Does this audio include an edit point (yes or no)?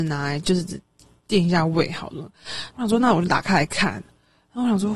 yes